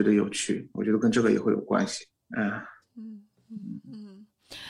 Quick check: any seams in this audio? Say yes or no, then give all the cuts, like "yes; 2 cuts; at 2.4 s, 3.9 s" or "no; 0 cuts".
yes; 1 cut; at 2.2 s